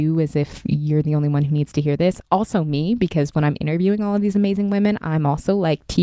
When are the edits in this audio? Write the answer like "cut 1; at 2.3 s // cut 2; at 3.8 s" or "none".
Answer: none

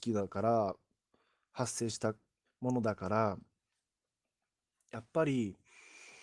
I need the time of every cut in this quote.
cut 1; at 2.5 s

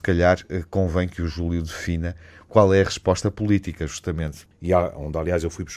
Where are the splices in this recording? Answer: cut 1; at 4.5 s

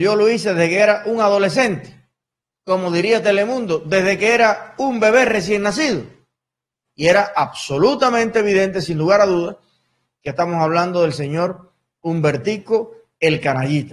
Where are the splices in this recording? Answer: cut 1; at 6.9 s

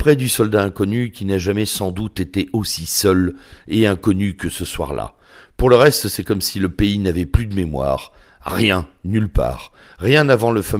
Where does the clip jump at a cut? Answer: none

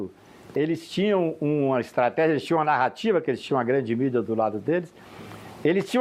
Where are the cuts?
none

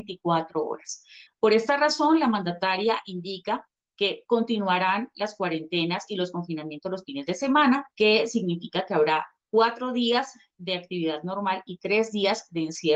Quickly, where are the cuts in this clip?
cut 1; at 1.3 s // cut 2; at 7.9 s

